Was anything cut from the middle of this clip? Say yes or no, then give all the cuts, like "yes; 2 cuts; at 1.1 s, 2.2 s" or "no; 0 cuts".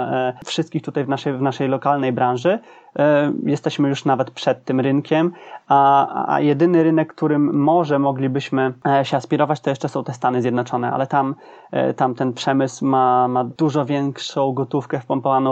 no; 0 cuts